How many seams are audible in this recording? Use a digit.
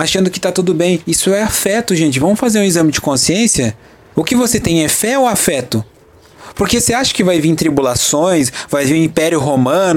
1